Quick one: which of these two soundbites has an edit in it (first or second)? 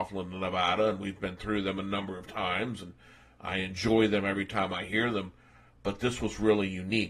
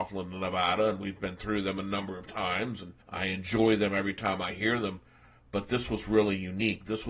second